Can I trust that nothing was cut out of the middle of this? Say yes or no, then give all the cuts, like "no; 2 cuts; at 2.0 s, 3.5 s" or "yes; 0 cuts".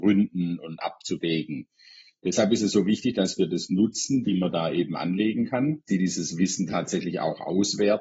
no; 2 cuts; at 4.2 s, 5.9 s